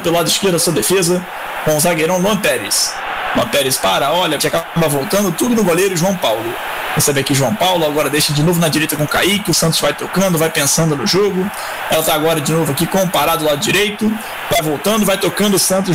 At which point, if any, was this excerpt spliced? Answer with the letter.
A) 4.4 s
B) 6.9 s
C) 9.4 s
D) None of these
A